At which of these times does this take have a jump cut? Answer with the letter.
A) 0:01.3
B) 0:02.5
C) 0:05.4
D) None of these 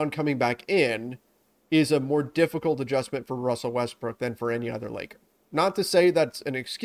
D